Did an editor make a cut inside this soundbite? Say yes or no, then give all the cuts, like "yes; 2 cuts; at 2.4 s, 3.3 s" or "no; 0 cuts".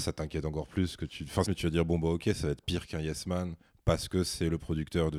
yes; 1 cut; at 1.4 s